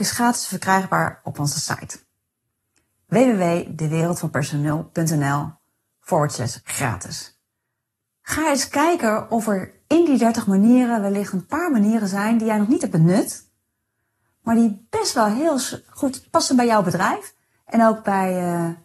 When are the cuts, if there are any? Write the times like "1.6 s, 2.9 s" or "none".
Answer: none